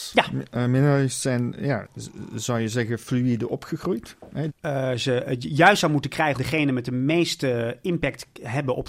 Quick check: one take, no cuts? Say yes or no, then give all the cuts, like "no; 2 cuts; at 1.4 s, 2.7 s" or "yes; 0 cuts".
no; 2 cuts; at 4.5 s, 6.3 s